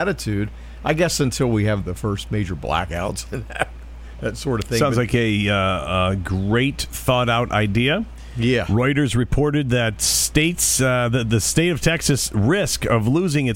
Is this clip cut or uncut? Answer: cut